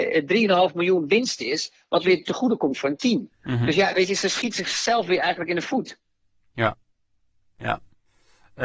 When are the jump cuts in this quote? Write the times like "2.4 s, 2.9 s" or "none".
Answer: none